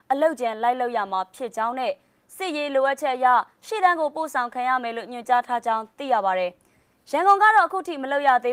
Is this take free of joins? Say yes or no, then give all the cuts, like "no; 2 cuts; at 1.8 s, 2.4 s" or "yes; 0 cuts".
yes; 0 cuts